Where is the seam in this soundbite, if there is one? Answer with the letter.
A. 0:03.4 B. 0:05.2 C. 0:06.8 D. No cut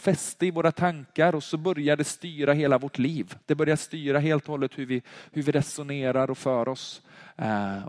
A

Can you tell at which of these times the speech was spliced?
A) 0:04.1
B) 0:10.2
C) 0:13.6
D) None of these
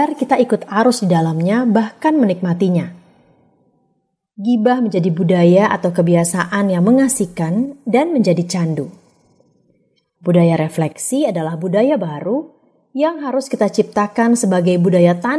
B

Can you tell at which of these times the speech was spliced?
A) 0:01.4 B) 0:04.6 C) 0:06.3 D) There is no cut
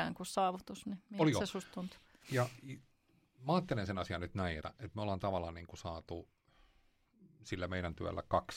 B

